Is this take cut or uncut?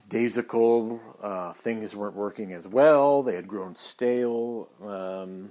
uncut